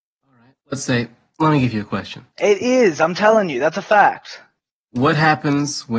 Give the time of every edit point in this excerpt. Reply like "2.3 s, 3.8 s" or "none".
2.3 s